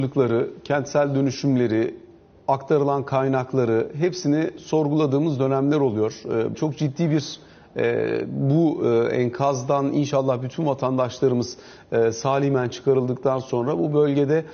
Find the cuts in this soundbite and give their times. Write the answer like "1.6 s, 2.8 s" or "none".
6.5 s